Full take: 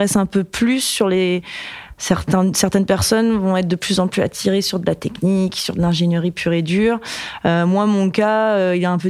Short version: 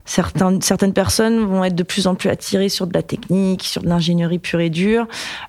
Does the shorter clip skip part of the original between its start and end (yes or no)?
no